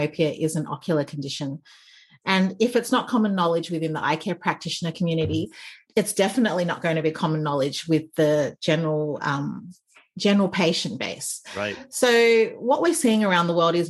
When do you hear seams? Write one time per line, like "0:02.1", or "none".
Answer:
0:05.9